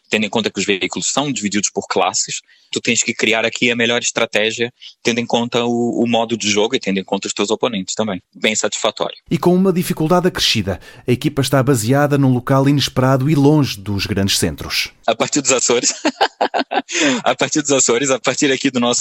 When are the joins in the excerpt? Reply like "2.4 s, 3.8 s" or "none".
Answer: 8.2 s